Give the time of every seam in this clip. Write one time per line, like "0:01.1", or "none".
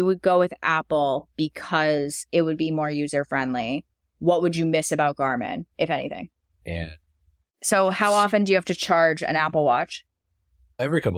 0:06.6